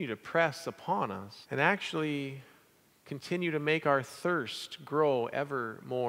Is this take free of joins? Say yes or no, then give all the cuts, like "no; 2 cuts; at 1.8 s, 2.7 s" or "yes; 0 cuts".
no; 1 cut; at 1.4 s